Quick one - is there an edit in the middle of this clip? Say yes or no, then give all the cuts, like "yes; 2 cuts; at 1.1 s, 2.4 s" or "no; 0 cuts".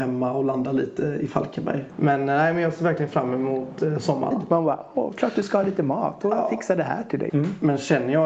yes; 3 cuts; at 1.9 s, 4.3 s, 7.3 s